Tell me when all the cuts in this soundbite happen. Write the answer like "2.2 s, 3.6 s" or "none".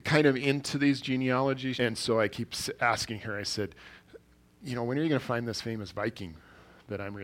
1.7 s